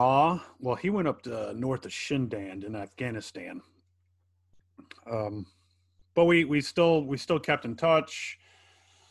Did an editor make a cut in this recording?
no; 0 cuts

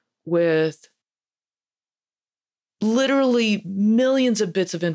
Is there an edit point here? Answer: no; 0 cuts

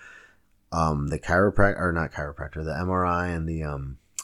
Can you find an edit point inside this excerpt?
no; 0 cuts

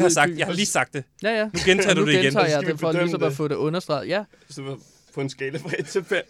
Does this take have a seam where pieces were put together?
no; 0 cuts

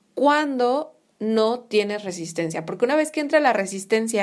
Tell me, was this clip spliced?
no; 0 cuts

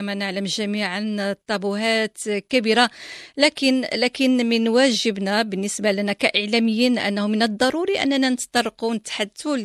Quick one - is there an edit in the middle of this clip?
no; 0 cuts

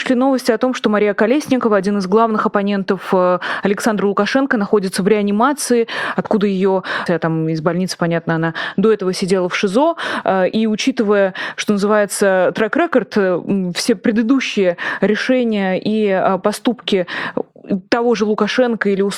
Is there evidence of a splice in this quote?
yes; 1 cut; at 7.1 s

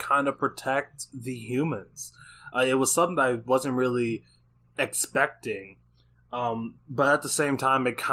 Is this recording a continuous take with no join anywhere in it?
yes; 0 cuts

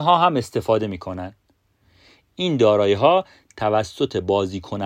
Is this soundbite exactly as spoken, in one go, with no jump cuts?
yes; 0 cuts

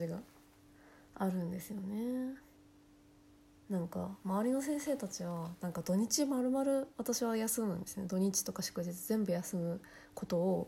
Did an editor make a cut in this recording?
yes; 1 cut; at 4.2 s

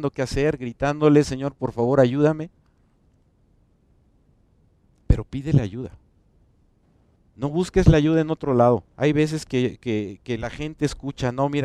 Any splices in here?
yes; 1 cut; at 8.9 s

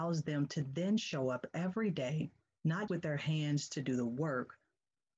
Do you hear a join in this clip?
yes; 1 cut; at 2.9 s

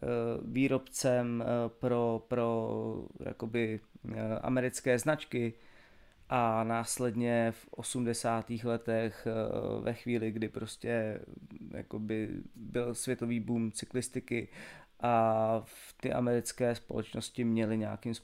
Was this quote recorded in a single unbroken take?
yes; 0 cuts

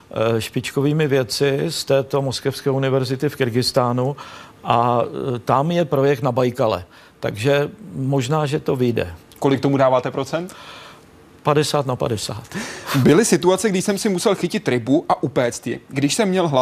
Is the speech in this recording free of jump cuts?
yes; 0 cuts

